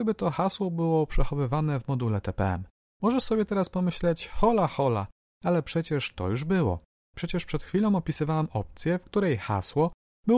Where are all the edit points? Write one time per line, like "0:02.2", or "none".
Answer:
none